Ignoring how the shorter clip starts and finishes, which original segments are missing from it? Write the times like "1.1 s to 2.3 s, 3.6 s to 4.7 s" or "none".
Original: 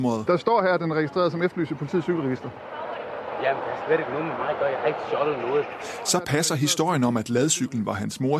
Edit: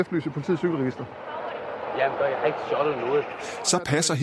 3.6 s to 4.6 s